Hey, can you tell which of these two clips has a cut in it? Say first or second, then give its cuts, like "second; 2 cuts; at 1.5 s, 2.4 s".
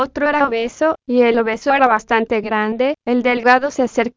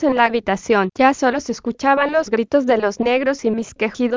second; 1 cut; at 0.9 s